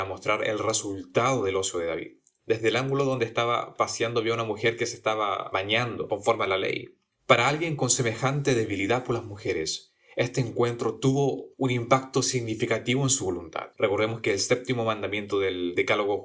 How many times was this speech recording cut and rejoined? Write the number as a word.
two